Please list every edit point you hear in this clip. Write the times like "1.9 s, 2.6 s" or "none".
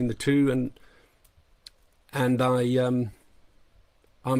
none